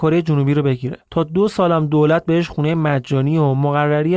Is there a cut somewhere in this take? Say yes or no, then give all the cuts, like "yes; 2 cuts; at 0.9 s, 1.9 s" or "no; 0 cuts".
yes; 1 cut; at 1.1 s